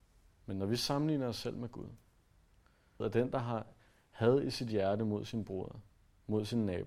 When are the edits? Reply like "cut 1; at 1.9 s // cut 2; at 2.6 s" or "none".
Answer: cut 1; at 3.0 s